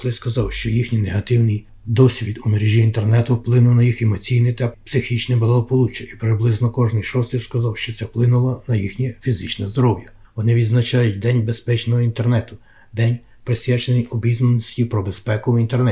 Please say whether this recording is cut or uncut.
cut